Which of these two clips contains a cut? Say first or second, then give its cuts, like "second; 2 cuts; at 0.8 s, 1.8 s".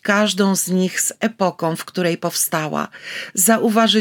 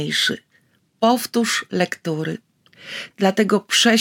second; 1 cut; at 3.1 s